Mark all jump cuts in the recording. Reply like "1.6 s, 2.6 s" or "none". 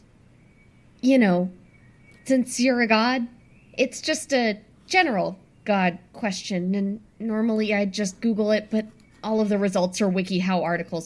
none